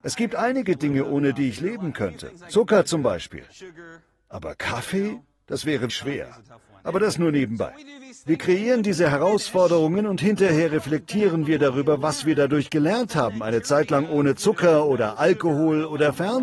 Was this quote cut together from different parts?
yes; 1 cut; at 5.9 s

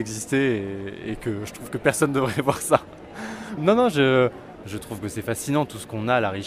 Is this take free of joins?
no; 2 cuts; at 3.6 s, 4.6 s

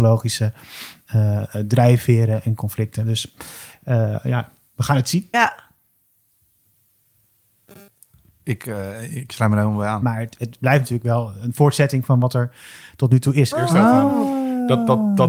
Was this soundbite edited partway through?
yes; 3 cuts; at 5.3 s, 10.0 s, 13.5 s

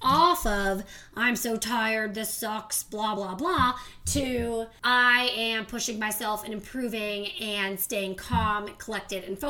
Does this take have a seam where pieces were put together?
no; 0 cuts

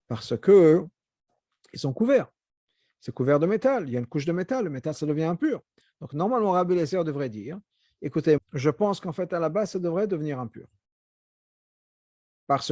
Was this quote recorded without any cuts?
no; 1 cut; at 8.4 s

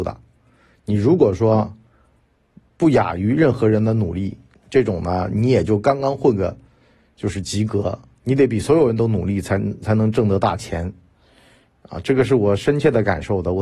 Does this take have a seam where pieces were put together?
no; 0 cuts

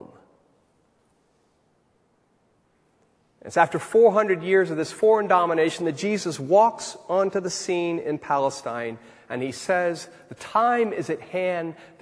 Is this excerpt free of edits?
yes; 0 cuts

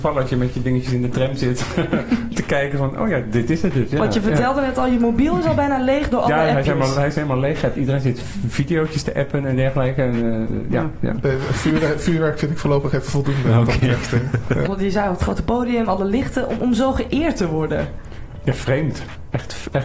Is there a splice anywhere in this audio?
yes; 2 cuts; at 11.2 s, 14.7 s

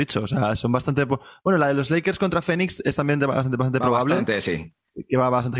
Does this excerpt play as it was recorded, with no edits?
yes; 0 cuts

